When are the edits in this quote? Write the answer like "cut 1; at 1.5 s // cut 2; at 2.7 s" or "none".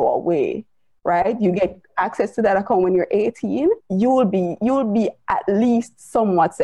cut 1; at 3.8 s